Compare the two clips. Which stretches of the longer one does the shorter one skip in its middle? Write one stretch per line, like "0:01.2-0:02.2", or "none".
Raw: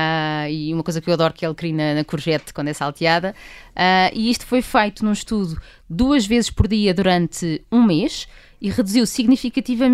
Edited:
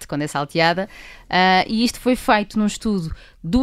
none